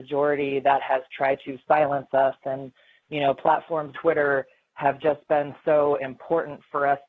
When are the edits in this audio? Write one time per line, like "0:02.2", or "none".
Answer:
0:03.9